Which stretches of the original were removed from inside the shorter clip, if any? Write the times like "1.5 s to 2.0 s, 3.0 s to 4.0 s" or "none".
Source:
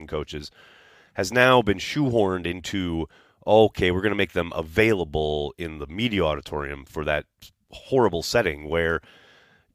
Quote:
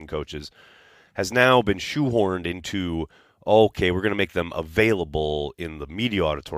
none